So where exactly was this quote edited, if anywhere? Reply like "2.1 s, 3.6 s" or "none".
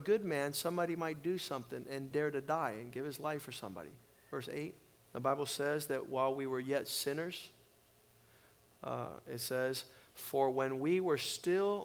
2.1 s, 5.1 s